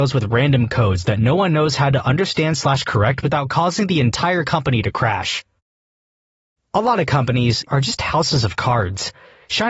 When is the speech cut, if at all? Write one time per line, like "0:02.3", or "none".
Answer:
0:07.7